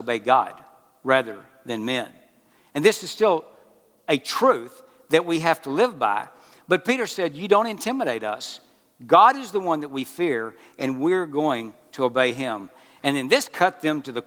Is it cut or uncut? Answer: uncut